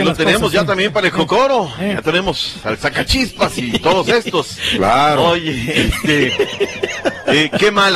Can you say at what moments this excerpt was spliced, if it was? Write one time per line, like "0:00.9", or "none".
none